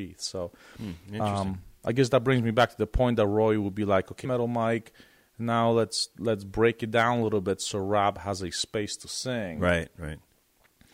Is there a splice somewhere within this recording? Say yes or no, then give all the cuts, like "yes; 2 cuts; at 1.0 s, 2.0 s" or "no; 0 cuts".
yes; 1 cut; at 4.2 s